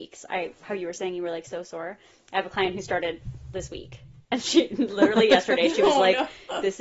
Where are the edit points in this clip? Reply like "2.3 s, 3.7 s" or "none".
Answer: none